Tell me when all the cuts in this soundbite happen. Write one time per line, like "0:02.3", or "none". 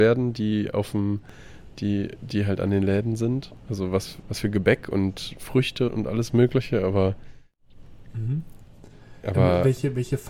0:04.2
0:05.9